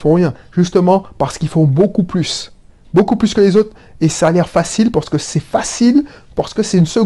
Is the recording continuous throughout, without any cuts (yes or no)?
yes